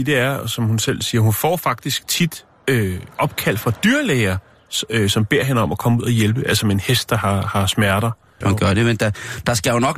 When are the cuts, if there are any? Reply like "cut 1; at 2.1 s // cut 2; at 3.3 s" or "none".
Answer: cut 1; at 8.4 s